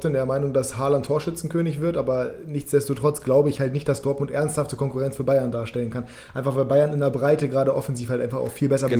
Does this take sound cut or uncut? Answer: uncut